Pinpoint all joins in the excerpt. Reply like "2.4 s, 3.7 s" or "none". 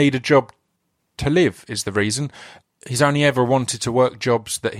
none